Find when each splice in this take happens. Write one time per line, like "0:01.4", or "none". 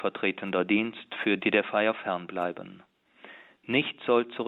0:01.4